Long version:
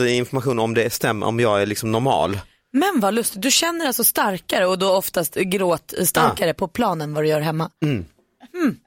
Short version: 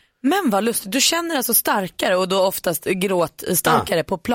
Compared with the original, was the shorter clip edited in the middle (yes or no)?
no